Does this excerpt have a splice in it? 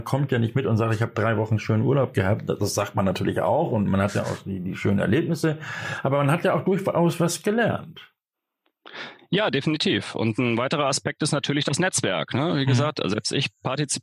no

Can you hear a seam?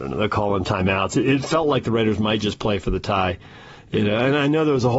no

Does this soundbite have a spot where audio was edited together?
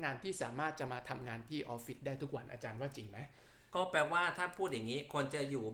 no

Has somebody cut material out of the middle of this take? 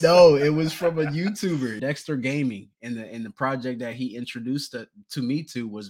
yes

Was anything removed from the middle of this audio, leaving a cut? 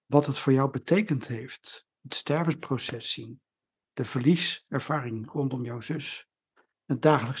no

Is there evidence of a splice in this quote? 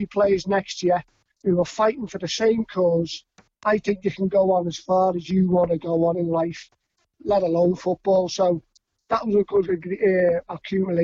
no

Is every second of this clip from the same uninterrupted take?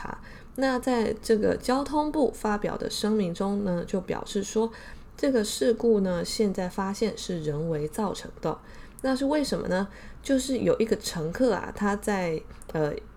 yes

